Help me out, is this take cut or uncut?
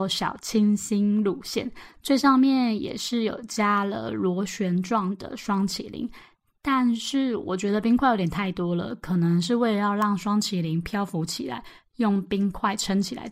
uncut